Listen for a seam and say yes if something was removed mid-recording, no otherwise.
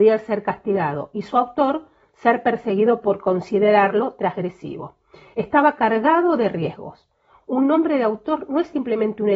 no